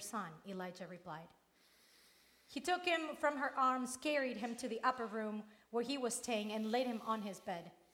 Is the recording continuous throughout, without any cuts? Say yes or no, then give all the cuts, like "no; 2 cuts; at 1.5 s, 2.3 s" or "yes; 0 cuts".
yes; 0 cuts